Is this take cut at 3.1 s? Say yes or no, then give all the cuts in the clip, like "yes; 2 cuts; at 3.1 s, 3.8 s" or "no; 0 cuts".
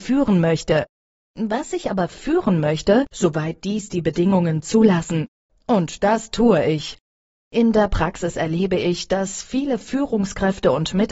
yes; 2 cuts; at 3.1 s, 5.5 s